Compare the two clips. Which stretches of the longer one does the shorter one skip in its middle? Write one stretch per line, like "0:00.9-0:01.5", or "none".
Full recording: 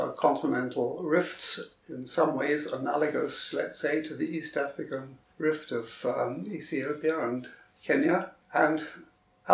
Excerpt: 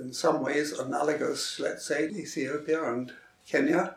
0:04.0-0:06.5